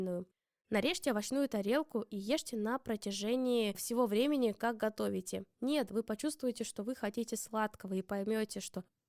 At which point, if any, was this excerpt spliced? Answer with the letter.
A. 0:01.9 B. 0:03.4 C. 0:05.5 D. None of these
C